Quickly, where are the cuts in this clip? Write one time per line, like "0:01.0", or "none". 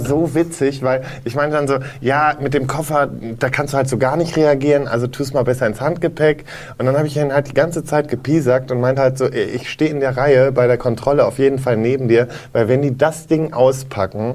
none